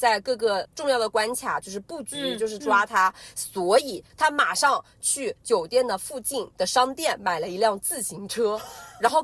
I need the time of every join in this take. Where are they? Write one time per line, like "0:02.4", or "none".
0:04.1